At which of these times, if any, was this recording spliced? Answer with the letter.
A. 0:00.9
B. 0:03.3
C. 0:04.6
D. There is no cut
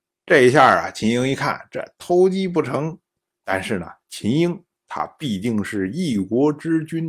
B